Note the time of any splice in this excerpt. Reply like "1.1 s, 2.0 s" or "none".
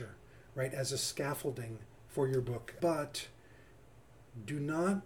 2.8 s